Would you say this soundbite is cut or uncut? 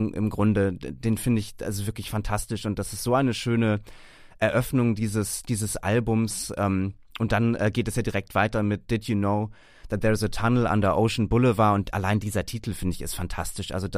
uncut